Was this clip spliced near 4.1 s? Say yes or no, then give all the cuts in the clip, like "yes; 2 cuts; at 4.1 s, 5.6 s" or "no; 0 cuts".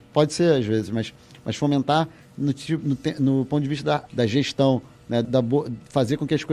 yes; 2 cuts; at 4.1 s, 5.2 s